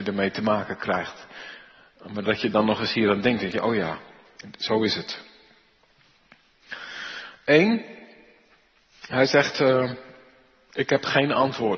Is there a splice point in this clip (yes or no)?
no